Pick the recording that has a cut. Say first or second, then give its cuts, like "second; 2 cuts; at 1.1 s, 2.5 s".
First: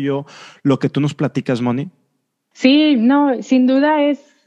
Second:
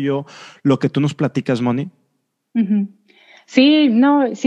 first; 1 cut; at 2.5 s